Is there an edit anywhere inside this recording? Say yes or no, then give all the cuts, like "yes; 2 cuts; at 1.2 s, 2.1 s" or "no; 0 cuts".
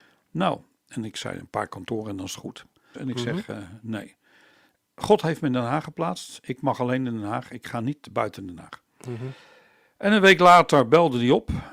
yes; 1 cut; at 2.9 s